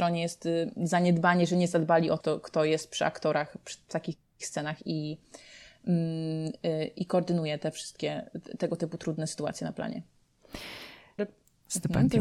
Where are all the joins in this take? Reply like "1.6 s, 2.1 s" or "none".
2.2 s, 11.2 s